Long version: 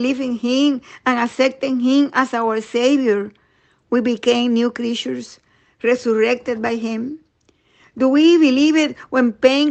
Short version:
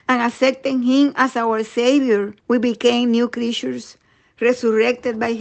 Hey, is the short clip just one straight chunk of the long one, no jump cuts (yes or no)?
no